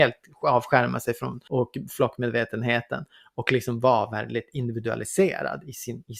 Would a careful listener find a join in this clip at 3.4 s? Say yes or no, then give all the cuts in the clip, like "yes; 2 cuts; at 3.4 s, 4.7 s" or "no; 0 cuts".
no; 1 cut; at 1.5 s